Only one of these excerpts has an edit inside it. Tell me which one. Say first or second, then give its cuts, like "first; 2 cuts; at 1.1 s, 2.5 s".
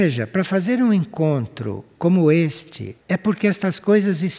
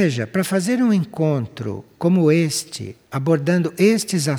first; 1 cut; at 3.0 s